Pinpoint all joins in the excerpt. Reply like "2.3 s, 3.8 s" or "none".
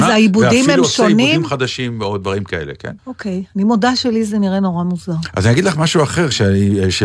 3.0 s